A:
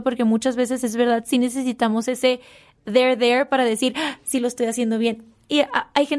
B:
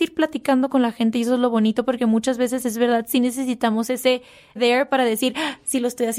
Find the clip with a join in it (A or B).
B